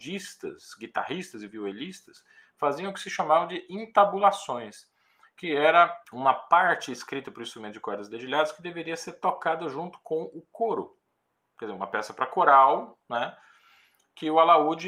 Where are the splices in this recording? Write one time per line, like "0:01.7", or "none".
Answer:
0:06.0